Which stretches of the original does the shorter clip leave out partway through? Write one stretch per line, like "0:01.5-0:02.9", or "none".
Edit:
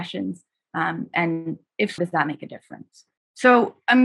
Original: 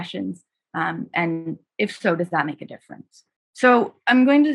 0:02.0-0:02.2